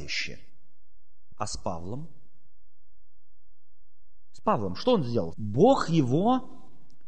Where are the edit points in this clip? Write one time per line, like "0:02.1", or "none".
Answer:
0:01.3
0:05.3